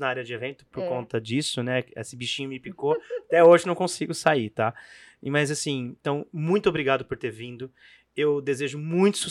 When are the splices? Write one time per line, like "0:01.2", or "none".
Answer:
none

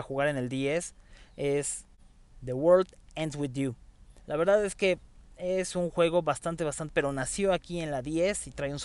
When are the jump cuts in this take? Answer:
0:04.2
0:06.9

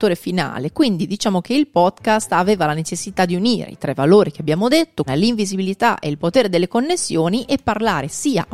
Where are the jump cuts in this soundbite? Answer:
0:05.1

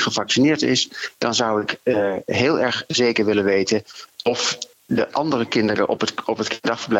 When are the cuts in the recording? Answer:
none

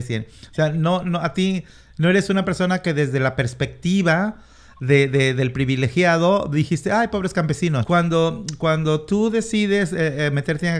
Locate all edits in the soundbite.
0:07.8

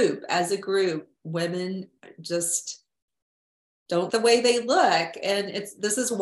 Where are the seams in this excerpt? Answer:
0:04.1

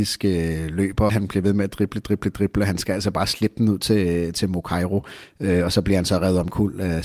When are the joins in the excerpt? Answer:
0:01.1

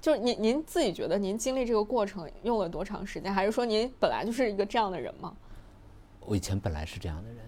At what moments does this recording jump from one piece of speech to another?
none

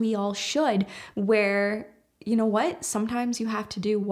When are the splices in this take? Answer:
0:01.1

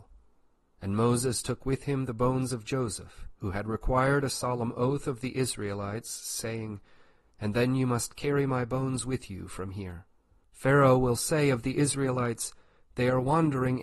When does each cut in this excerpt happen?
0:07.2
0:10.4

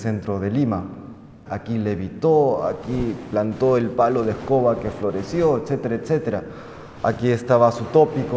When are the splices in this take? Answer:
0:01.5

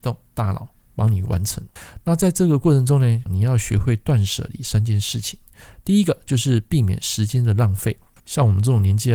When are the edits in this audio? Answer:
0:03.3

